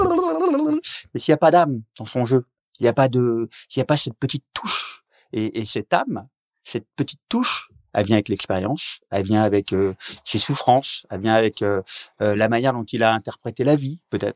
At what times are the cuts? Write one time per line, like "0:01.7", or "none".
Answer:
none